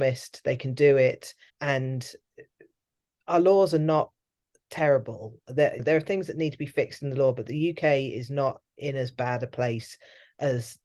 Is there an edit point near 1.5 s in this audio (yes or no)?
yes